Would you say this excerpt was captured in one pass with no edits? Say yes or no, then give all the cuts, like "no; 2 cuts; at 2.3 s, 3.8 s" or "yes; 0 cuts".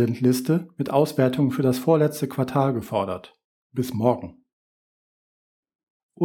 yes; 0 cuts